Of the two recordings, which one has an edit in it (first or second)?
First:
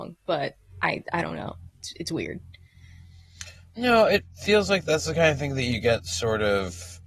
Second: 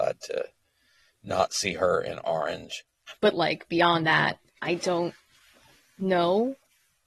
second